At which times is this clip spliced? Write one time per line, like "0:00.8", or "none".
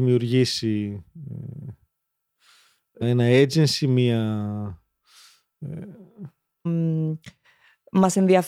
0:03.0
0:06.7